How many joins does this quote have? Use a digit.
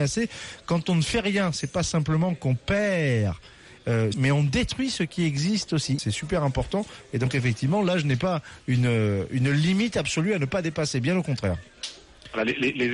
2